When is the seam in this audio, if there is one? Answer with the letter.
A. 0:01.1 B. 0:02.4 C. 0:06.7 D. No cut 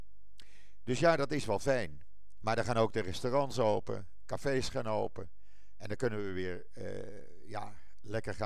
B